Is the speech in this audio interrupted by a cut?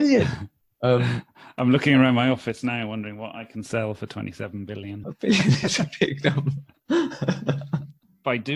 yes; 1 cut; at 5.0 s

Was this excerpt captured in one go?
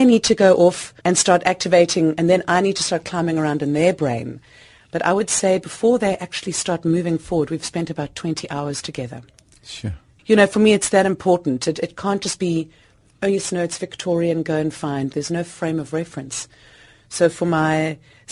no; 2 cuts; at 1.0 s, 15.1 s

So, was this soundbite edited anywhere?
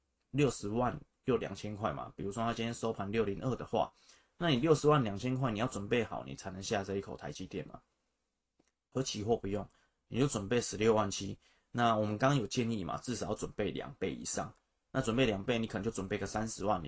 no; 0 cuts

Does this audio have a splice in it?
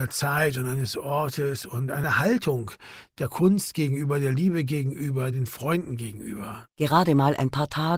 yes; 1 cut; at 5.3 s

